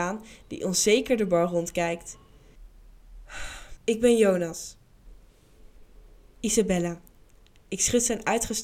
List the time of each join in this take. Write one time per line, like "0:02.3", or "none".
0:03.8